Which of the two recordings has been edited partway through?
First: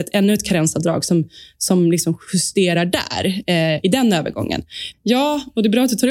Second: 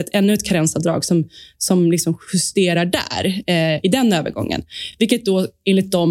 first; 1 cut; at 4.9 s

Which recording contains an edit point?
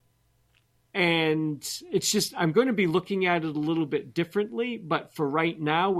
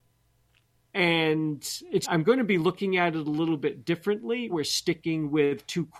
second; 2 cuts; at 2.0 s, 4.5 s

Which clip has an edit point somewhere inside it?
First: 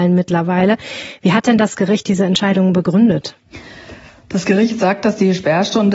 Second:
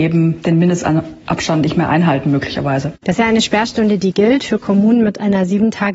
second; 1 cut; at 3.0 s

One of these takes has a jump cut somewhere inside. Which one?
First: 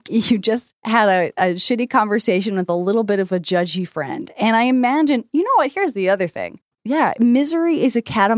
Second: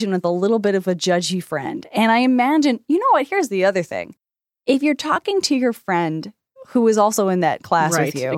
first; 1 cut; at 6.7 s

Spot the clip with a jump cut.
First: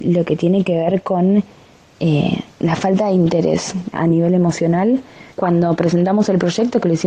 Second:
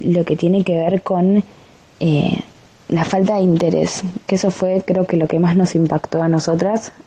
first; 3 cuts; at 2.5 s, 3.9 s, 5.3 s

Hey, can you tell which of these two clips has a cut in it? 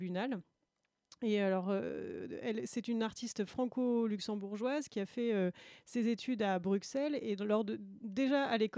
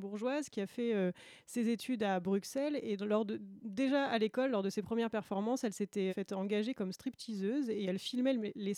second; 1 cut; at 6.1 s

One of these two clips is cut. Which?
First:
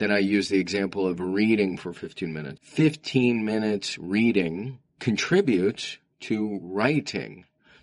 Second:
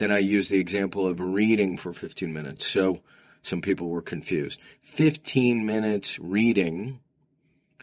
first; 2 cuts; at 2.6 s, 4.9 s

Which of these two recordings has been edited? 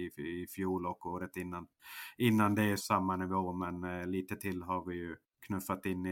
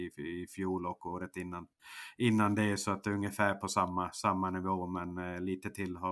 first; 1 cut; at 2.8 s

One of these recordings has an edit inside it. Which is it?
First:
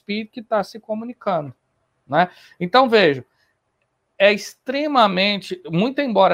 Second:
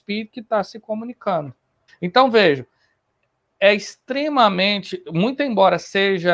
second; 1 cut; at 1.9 s

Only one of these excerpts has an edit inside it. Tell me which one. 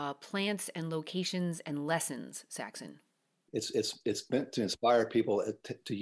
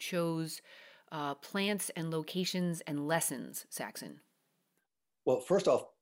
first; 1 cut; at 3.5 s

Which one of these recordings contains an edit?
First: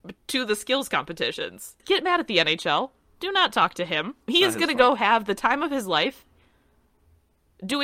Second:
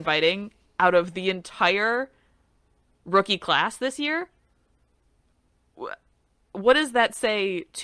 first; 2 cuts; at 1.8 s, 4.2 s

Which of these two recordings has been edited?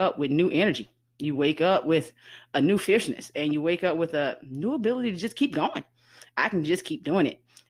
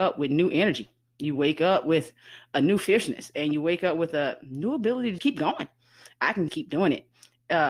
second; 2 cuts; at 5.2 s, 6.5 s

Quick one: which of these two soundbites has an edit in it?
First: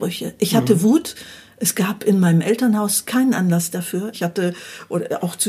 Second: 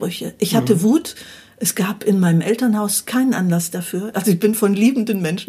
first; 1 cut; at 4.1 s

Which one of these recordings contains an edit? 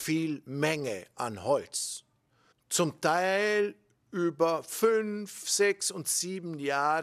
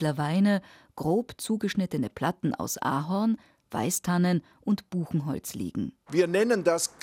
second; 1 cut; at 6.1 s

